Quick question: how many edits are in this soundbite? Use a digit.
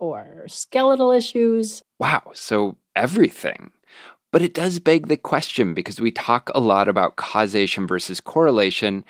1